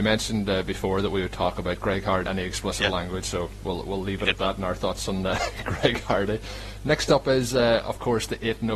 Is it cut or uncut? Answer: cut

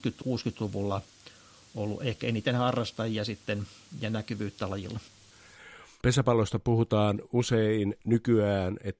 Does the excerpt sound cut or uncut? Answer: uncut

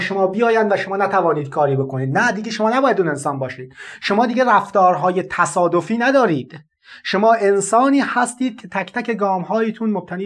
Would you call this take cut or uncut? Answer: uncut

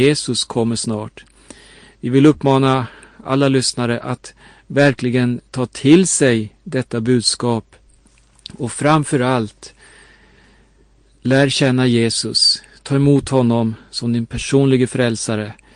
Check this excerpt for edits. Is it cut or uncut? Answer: uncut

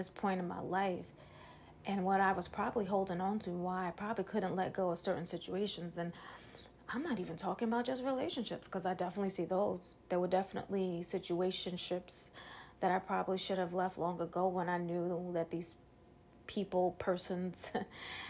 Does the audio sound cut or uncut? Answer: uncut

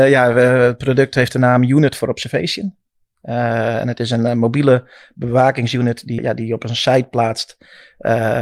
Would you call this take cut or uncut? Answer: cut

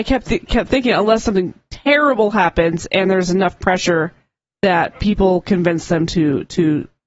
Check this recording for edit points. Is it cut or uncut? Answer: uncut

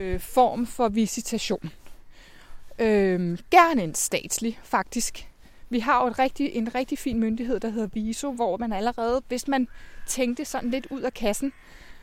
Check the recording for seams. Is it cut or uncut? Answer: uncut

